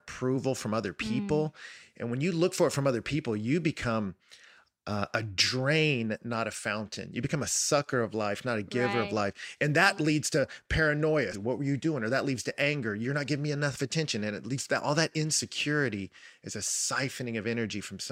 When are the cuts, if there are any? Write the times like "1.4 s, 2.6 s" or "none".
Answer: 11.3 s